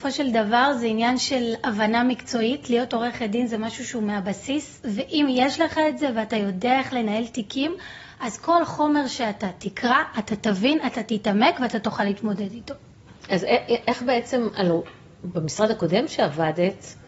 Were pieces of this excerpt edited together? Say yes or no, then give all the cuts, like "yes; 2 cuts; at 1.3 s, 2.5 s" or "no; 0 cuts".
no; 0 cuts